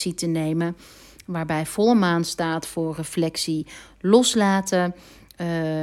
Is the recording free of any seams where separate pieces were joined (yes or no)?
yes